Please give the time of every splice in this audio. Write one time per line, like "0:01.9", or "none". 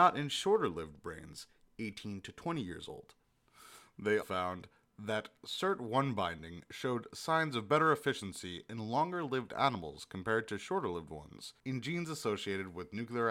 0:04.2
0:11.6